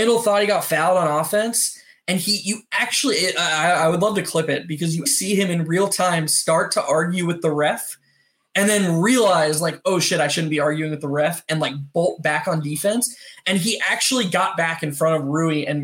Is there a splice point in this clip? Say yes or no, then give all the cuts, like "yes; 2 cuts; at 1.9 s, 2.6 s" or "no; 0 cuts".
yes; 1 cut; at 5.1 s